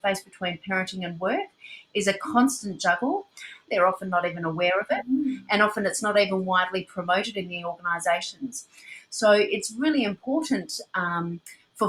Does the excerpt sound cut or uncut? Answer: cut